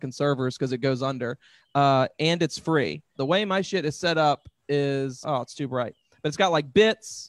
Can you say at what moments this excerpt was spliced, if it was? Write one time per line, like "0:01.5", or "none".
0:03.1
0:05.2